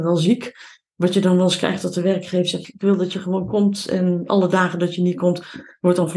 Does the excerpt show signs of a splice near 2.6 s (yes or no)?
yes